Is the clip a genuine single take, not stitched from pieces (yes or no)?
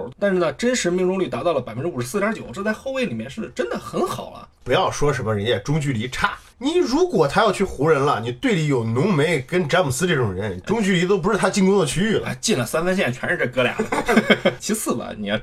yes